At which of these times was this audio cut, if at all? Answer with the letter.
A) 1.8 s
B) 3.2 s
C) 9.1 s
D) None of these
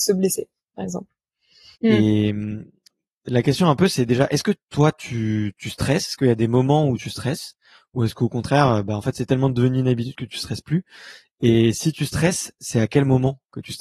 A